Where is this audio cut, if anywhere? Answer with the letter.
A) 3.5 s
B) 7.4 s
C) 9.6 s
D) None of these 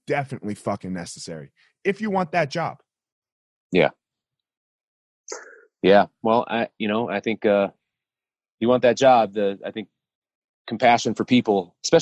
D